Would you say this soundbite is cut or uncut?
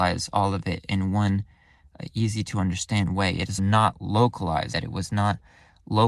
cut